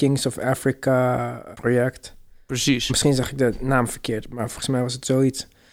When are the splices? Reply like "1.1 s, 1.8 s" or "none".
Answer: 1.5 s